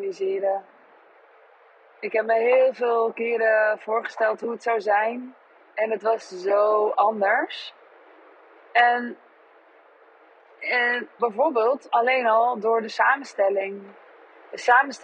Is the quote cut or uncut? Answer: cut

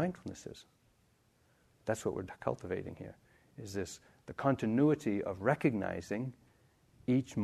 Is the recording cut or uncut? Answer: uncut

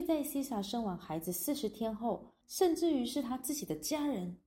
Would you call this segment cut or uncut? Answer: cut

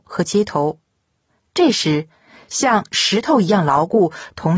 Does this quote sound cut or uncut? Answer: uncut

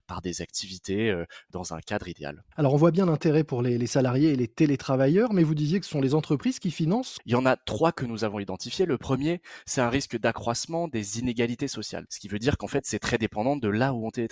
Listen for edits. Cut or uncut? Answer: cut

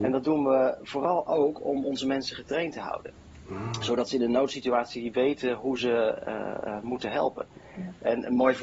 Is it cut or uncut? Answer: uncut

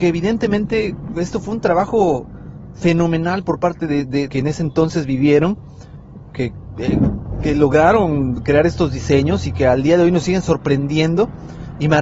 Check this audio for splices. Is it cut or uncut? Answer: cut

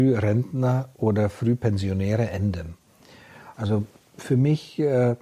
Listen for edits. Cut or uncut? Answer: cut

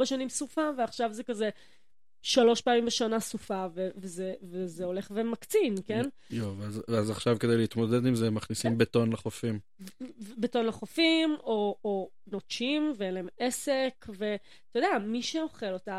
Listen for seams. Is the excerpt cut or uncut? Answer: uncut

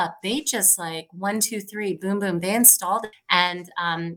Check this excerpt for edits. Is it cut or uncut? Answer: cut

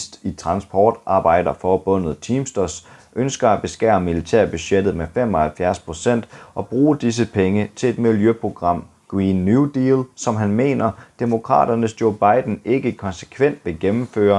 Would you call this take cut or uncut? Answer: uncut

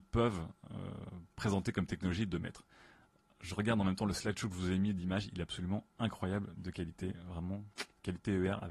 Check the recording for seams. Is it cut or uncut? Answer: uncut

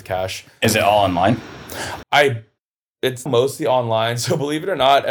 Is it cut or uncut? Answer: cut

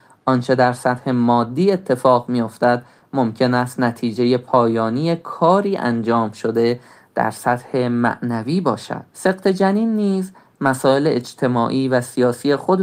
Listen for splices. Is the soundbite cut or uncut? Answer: cut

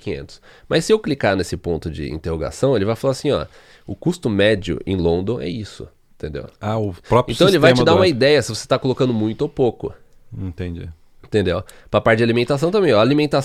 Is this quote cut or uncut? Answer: uncut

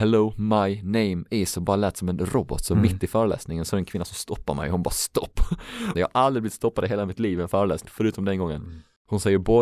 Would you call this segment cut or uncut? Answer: cut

